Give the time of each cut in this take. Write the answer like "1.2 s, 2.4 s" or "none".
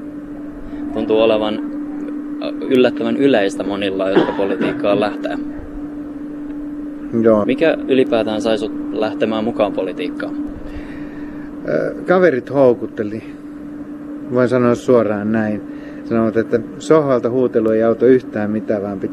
7.4 s